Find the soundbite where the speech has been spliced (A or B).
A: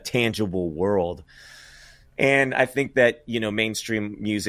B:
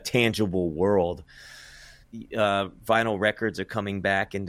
B